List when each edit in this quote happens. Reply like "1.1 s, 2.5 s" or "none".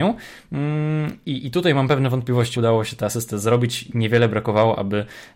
2.5 s